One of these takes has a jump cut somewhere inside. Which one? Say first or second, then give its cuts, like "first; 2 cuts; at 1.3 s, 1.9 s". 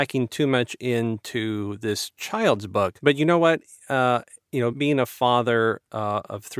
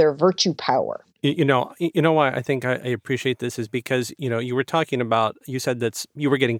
first; 1 cut; at 4.7 s